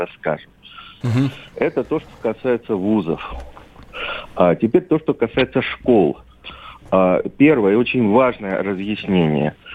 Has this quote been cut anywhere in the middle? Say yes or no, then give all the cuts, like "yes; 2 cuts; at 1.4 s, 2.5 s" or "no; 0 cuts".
yes; 1 cut; at 1.0 s